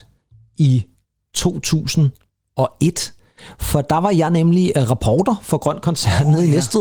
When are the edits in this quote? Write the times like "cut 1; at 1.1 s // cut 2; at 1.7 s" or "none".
none